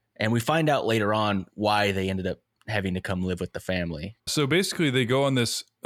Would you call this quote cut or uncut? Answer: cut